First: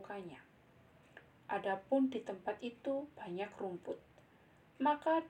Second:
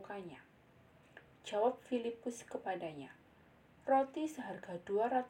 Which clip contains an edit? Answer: first; 1 cut; at 1.3 s

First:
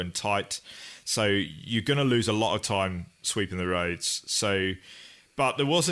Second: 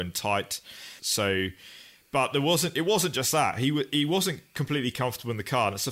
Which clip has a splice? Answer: second; 1 cut; at 1.0 s

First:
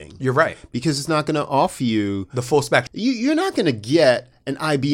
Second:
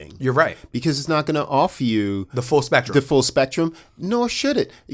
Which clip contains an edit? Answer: first; 1 cut; at 2.9 s

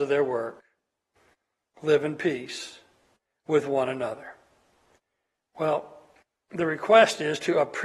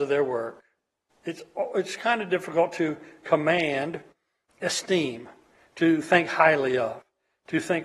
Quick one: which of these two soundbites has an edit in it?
second; 1 cut; at 1.1 s

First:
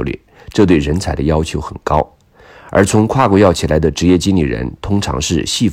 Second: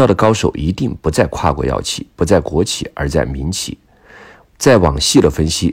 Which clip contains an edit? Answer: second; 1 cut; at 4.4 s

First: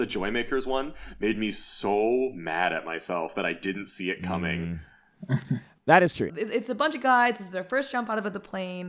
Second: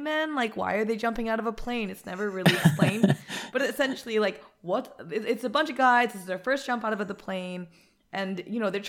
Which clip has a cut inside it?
first; 1 cut; at 6.3 s

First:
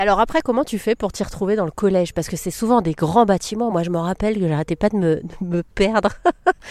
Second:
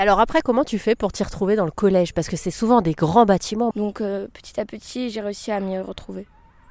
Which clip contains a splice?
second; 1 cut; at 3.7 s

